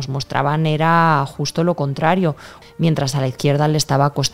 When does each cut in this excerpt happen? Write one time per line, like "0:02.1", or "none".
0:02.6